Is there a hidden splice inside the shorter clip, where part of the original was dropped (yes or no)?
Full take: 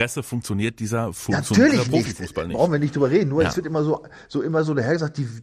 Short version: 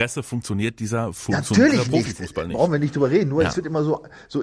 no